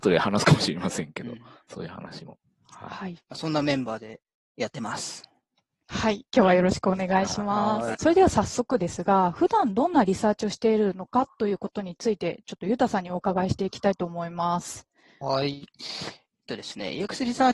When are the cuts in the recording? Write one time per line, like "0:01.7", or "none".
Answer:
0:07.9